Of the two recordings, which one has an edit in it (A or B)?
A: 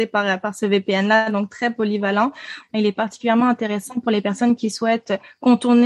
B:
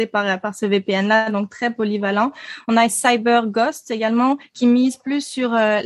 A